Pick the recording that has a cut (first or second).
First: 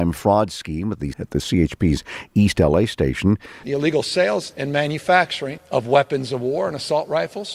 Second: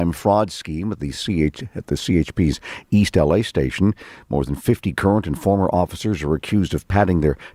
first